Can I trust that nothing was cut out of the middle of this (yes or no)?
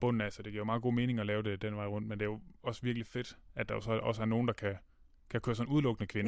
yes